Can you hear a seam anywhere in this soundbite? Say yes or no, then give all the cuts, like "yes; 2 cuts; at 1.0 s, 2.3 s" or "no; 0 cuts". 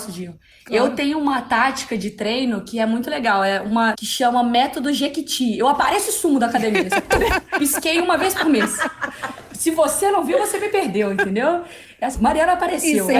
yes; 2 cuts; at 3.9 s, 12.1 s